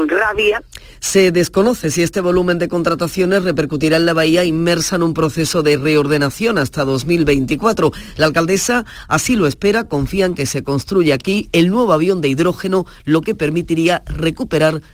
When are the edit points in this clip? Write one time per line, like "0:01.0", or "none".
none